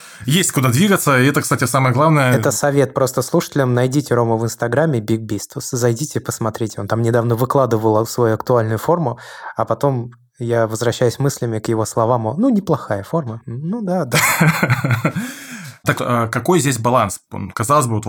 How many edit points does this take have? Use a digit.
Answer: 1